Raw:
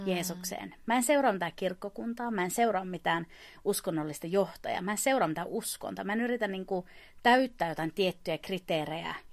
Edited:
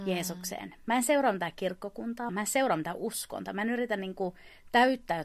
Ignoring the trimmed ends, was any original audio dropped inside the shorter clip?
yes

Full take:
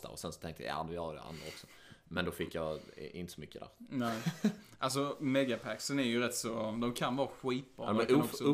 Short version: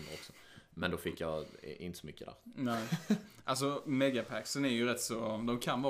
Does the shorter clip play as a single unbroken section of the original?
yes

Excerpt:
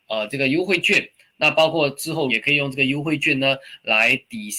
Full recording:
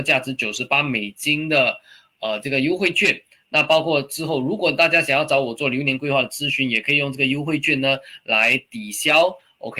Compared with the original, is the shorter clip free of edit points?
no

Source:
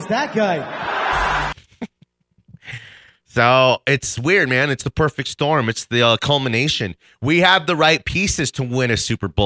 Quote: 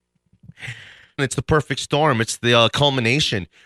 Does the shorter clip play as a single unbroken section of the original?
no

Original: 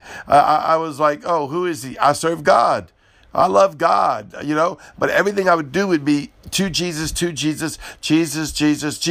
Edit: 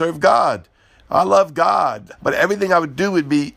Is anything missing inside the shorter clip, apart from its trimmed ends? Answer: yes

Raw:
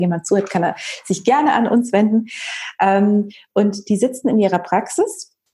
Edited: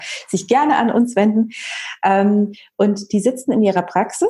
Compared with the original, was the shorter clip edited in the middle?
no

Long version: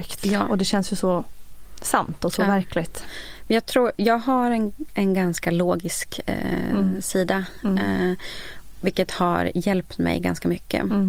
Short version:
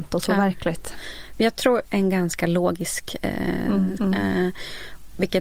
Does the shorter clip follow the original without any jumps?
no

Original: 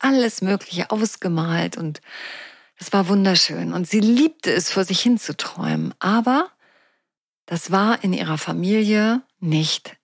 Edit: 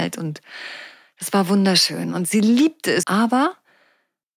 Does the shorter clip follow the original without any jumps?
no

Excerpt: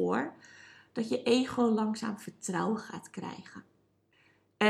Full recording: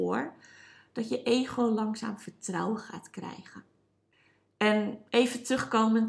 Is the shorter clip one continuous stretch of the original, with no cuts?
yes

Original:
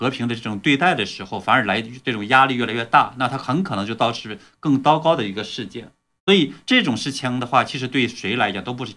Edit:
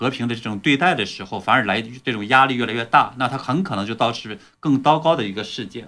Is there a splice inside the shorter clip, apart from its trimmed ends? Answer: no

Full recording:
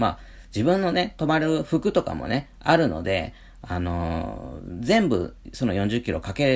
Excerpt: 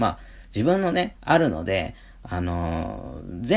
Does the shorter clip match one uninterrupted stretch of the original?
no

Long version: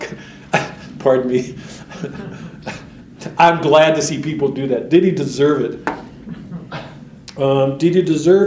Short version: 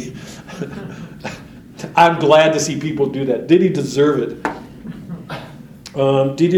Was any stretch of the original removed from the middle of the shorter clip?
no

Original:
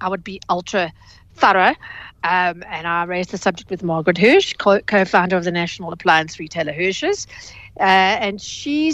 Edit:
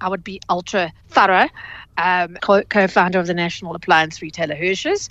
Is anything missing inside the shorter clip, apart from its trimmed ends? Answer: yes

